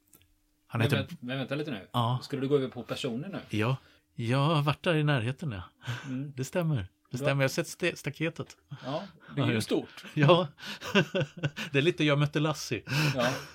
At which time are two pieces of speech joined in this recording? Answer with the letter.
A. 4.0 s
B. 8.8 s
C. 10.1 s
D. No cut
A